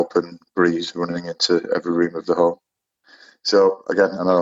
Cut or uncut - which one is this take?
uncut